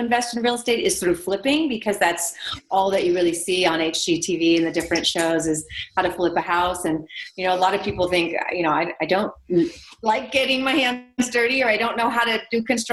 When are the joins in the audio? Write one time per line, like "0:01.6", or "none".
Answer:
none